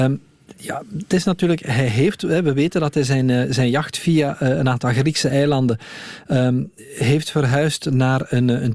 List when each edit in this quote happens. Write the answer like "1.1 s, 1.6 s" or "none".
none

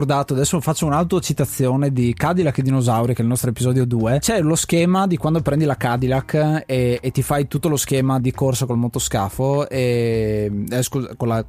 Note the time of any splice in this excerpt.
8.2 s

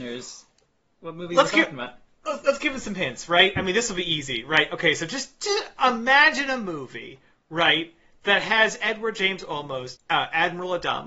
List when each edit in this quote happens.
10.0 s

